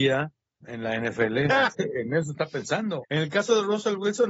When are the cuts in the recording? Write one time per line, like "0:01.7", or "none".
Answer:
0:01.7
0:03.0